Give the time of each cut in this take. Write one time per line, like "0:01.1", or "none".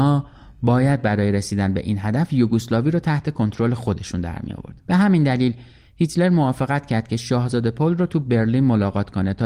0:04.8

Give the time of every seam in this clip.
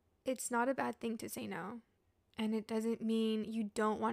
none

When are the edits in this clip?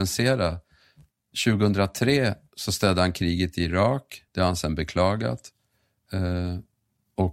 0:04.3

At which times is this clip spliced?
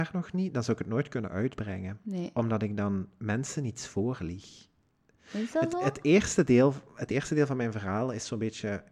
none

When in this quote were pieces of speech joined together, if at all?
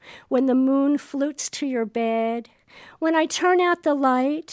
none

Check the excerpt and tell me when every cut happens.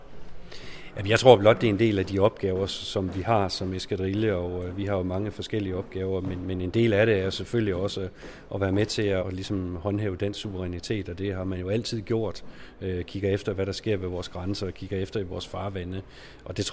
0:09.2

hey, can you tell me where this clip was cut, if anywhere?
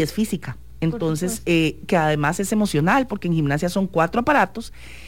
none

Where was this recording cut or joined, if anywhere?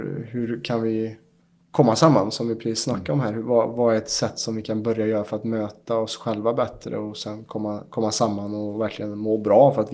none

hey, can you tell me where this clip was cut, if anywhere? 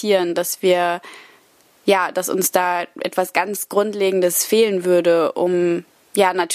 none

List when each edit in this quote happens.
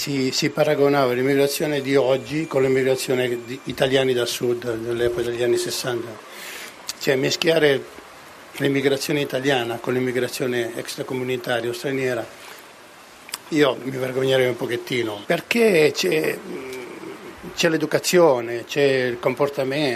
0:15.2

